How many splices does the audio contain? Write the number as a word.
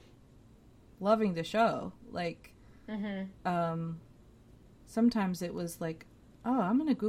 zero